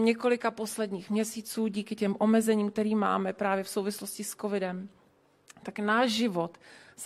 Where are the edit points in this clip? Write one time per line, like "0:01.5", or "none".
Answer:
none